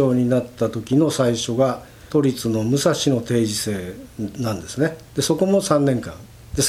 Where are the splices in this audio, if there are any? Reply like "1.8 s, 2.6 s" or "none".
none